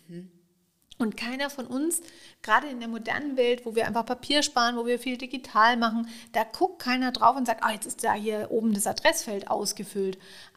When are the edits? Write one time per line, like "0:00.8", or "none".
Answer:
none